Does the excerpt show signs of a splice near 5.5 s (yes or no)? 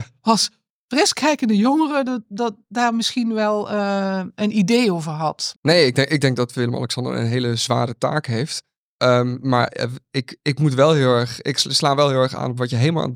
yes